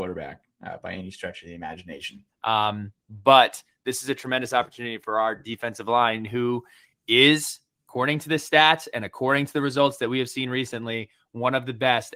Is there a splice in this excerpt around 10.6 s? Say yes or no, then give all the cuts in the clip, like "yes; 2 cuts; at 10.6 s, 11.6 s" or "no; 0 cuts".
no; 1 cut; at 2.3 s